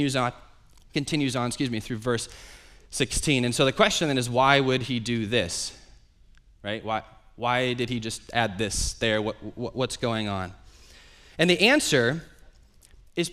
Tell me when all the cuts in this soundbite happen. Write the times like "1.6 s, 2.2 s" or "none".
none